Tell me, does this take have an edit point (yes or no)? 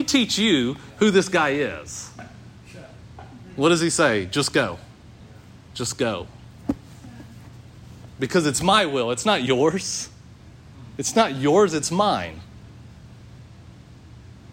no